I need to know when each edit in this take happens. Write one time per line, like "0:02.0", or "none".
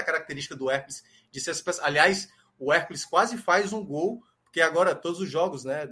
none